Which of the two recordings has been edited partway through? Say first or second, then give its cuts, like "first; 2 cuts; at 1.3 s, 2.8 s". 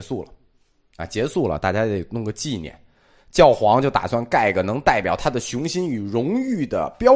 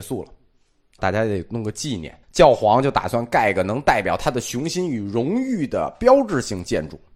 second; 2 cuts; at 1.0 s, 2.2 s